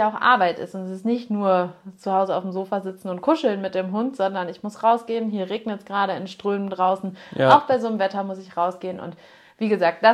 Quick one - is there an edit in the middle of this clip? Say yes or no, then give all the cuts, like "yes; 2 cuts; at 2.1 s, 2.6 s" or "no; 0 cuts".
no; 0 cuts